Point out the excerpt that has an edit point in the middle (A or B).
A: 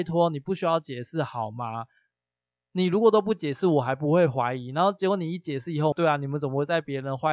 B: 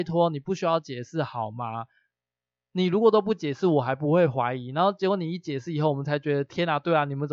A